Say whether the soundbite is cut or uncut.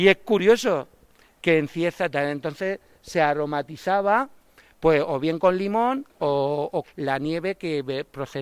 cut